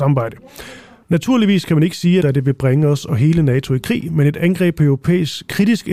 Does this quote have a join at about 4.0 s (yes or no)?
no